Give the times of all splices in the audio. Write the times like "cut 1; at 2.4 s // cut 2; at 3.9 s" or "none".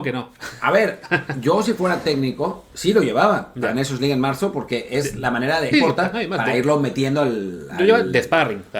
cut 1; at 5.7 s